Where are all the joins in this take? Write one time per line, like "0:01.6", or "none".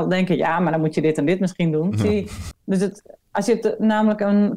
0:02.5

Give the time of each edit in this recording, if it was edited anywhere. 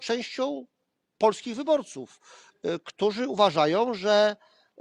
none

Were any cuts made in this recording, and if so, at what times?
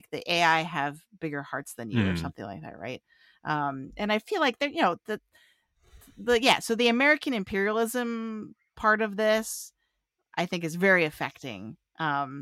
none

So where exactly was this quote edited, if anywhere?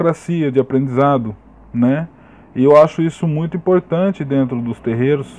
none

